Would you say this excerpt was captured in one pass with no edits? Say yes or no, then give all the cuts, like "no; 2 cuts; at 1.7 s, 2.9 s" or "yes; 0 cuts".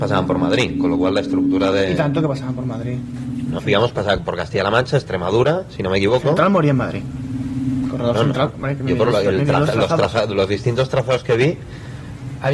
no; 1 cut; at 3.6 s